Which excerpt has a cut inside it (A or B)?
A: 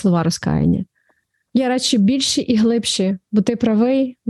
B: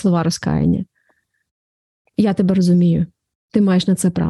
A